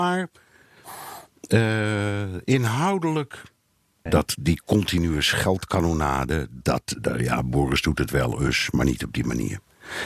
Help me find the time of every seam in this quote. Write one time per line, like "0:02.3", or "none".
0:04.1
0:07.0